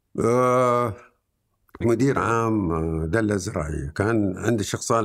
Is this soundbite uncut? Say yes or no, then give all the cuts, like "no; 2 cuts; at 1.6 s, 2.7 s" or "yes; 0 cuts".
no; 1 cut; at 1.8 s